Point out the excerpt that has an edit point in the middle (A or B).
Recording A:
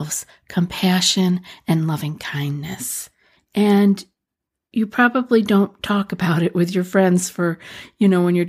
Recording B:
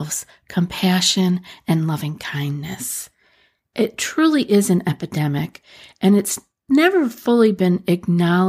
A